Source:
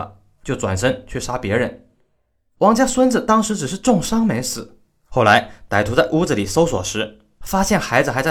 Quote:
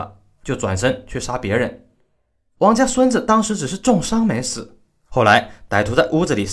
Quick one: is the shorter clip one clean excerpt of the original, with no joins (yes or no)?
yes